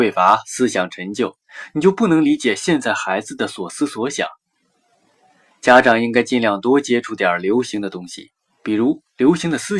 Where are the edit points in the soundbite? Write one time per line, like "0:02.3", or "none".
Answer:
none

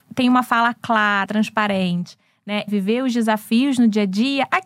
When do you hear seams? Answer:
0:01.3
0:02.7

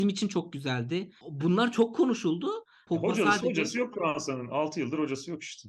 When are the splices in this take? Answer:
0:01.2
0:02.9

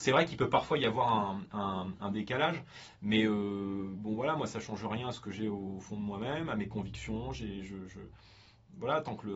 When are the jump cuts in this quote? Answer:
none

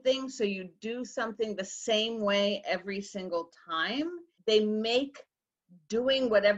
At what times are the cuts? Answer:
0:04.4

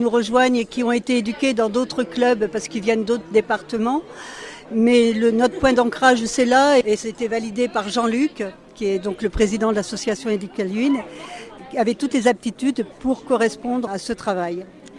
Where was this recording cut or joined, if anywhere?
0:06.8
0:13.9

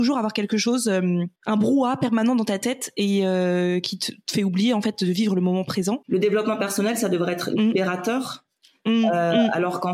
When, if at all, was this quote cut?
0:01.4

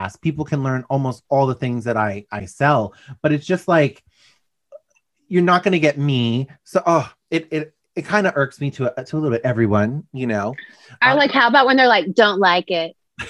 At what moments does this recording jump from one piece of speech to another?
none

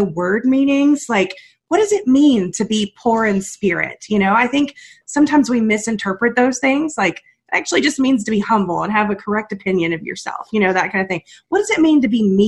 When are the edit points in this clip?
none

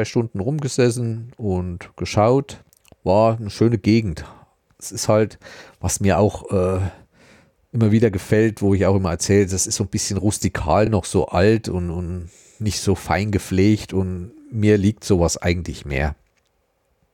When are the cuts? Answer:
none

